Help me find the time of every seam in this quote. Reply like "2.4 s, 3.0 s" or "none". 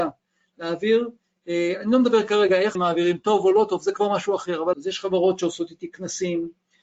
2.7 s, 4.7 s